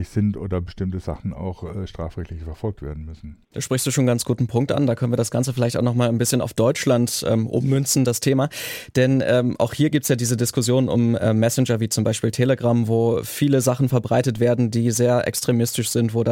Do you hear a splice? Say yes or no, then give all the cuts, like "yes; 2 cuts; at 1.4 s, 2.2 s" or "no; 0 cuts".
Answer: yes; 1 cut; at 3.4 s